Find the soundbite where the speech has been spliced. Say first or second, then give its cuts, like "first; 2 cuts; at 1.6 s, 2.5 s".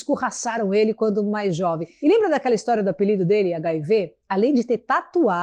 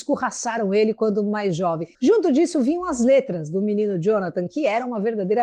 second; 1 cut; at 1.9 s